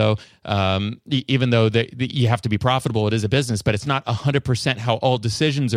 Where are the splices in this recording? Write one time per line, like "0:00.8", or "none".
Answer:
none